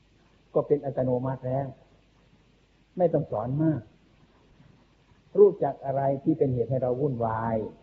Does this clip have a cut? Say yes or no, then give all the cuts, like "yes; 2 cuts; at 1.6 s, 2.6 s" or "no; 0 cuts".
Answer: no; 0 cuts